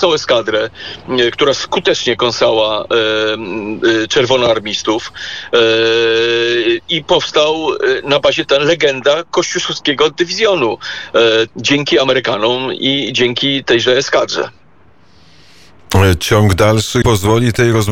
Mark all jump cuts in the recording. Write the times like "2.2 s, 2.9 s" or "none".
11.5 s, 17.0 s